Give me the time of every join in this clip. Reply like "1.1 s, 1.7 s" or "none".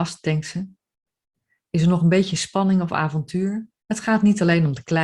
3.8 s